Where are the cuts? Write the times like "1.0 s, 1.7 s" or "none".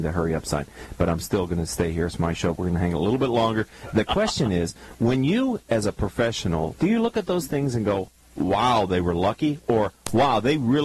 6.7 s